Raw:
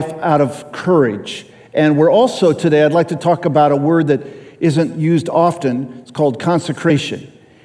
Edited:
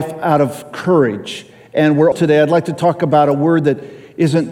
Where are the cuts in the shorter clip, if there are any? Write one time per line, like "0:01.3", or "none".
0:02.1